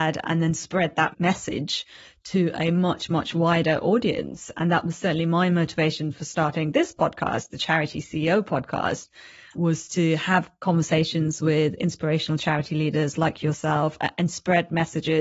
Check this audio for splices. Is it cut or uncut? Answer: uncut